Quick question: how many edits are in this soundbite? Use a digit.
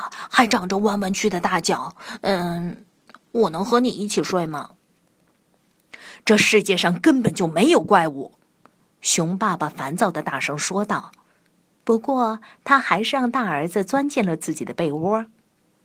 1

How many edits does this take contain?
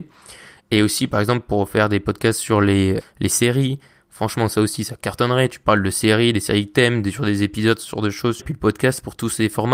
2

